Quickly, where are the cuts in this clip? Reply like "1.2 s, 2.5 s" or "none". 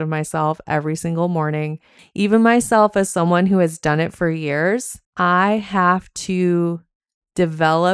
2.0 s, 5.0 s